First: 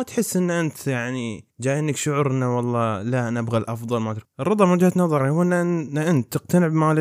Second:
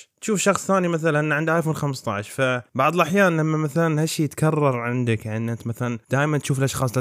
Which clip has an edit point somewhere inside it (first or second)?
first